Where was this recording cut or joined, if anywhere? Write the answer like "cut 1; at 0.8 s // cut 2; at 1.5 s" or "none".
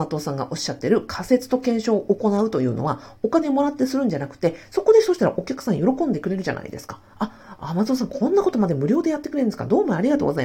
cut 1; at 4.6 s

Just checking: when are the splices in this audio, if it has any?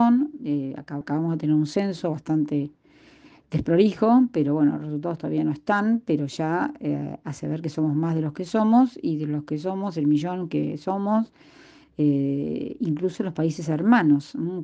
cut 1; at 1.0 s // cut 2; at 11.8 s

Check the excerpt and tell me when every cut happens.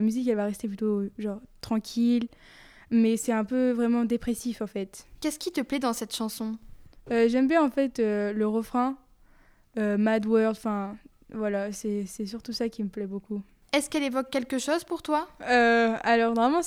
none

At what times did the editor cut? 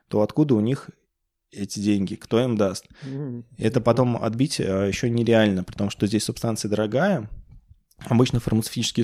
none

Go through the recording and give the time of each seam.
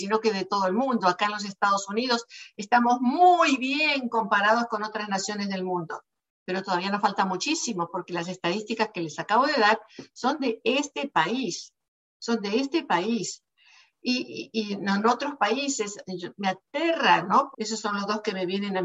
cut 1; at 17.5 s

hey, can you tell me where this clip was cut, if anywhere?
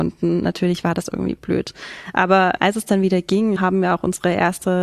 cut 1; at 3.6 s

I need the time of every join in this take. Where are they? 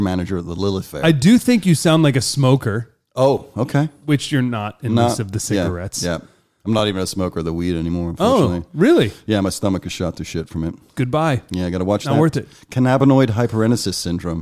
none

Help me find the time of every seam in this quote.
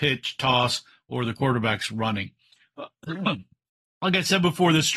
none

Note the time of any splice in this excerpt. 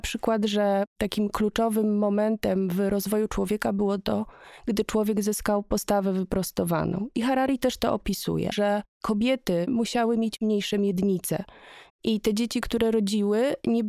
cut 1; at 8.5 s // cut 2; at 9.7 s // cut 3; at 11.9 s

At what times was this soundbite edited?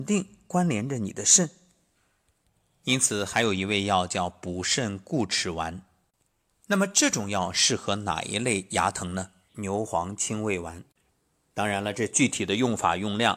cut 1; at 9.5 s

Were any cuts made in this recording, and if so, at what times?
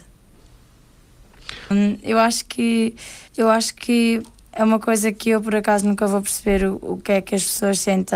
cut 1; at 1.7 s // cut 2; at 3.3 s

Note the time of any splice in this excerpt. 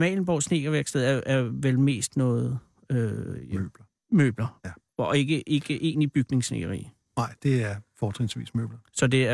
none

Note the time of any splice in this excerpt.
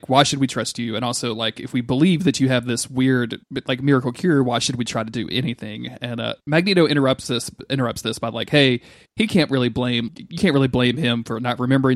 cut 1; at 10.1 s

